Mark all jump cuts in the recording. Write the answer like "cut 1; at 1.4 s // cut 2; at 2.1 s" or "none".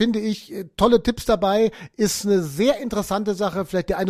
none